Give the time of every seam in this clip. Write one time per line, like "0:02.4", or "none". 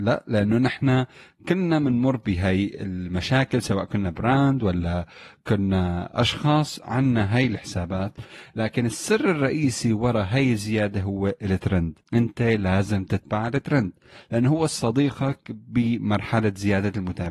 0:12.0